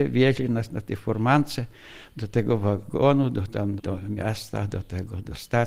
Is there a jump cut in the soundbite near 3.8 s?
yes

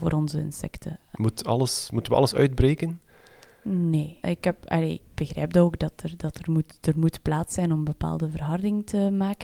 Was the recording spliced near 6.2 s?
no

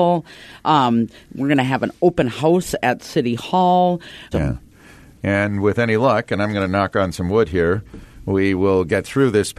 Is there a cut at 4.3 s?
yes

